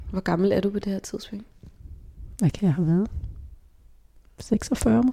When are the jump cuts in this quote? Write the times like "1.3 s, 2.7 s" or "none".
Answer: none